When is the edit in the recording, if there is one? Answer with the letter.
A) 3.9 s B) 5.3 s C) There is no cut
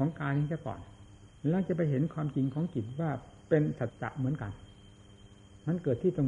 A